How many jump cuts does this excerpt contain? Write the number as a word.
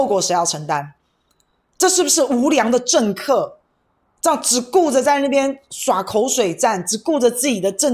zero